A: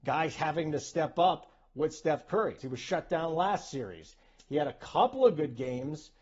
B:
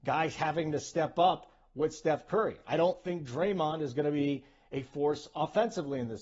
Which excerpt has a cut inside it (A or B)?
A